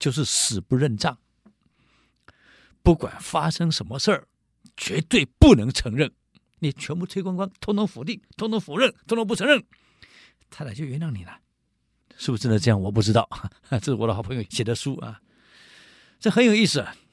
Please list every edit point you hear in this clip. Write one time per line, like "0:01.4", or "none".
none